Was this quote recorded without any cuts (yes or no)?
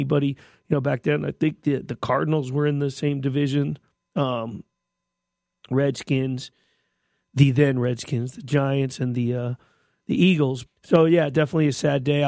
no